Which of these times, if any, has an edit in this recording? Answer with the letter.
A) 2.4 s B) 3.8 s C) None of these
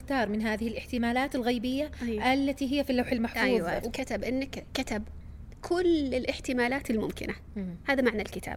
B